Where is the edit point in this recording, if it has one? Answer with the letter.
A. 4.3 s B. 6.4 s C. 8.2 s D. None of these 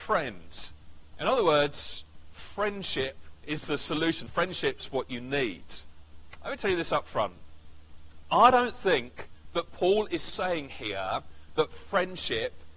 A